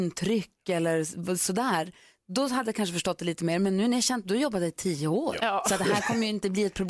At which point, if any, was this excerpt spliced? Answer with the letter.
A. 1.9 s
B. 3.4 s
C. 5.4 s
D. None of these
C